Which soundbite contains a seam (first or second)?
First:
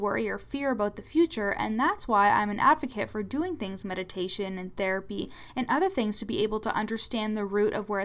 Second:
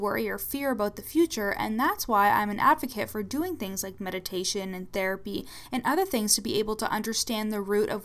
first